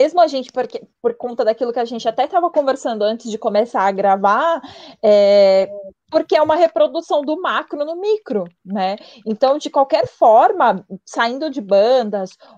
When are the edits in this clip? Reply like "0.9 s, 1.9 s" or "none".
8.6 s